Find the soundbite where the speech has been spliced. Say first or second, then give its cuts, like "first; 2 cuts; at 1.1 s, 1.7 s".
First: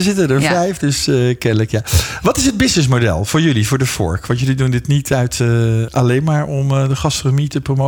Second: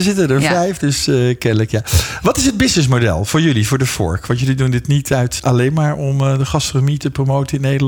second; 1 cut; at 5.4 s